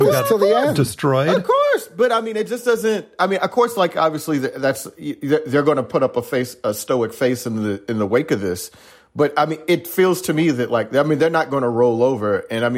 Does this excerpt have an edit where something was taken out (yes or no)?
no